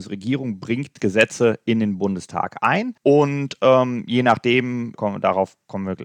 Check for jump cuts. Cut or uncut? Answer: cut